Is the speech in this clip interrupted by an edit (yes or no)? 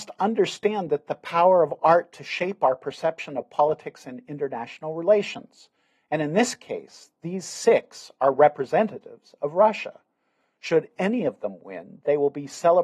no